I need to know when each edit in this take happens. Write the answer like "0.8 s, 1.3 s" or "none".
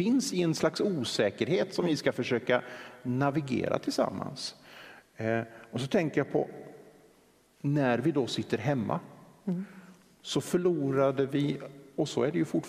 none